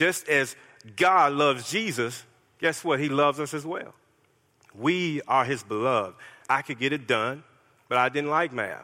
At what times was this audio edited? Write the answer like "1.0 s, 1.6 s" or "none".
6.4 s